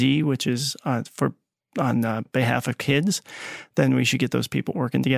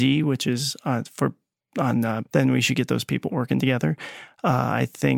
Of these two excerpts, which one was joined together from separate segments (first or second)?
second